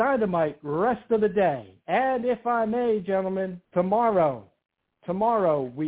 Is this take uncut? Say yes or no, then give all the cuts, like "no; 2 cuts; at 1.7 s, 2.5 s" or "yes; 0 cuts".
no; 1 cut; at 3.6 s